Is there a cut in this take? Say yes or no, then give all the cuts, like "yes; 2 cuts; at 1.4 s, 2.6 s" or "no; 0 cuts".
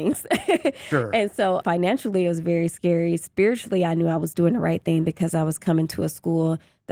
yes; 1 cut; at 1.6 s